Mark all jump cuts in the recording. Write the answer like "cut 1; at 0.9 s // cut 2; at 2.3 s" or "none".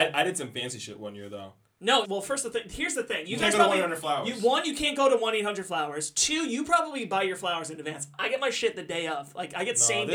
cut 1; at 2.0 s